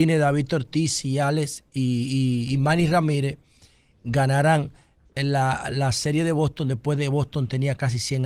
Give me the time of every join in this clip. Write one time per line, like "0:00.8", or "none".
none